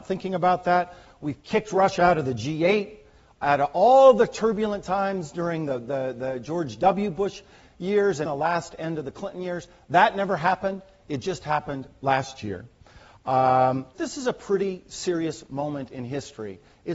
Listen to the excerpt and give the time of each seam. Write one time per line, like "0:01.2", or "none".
0:08.2
0:13.9